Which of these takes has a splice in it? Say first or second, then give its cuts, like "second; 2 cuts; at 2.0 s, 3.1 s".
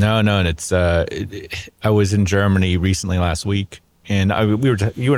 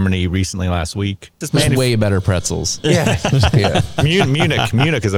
second; 1 cut; at 1.4 s